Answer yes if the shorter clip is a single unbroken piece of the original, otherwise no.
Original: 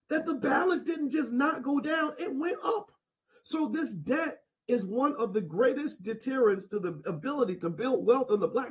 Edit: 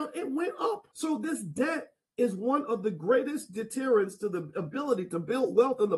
no